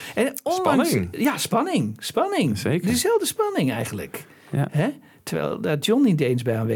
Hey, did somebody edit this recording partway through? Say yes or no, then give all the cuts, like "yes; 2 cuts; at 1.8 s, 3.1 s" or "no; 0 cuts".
no; 0 cuts